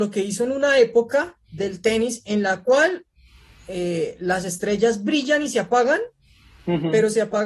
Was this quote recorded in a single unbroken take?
yes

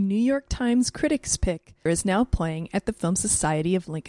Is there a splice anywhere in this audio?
yes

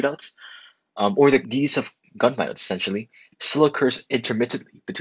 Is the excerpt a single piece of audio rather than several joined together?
no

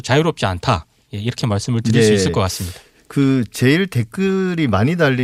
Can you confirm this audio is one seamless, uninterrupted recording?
yes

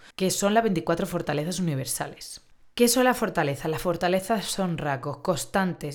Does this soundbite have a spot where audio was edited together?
no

